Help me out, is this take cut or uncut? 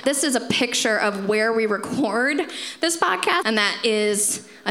cut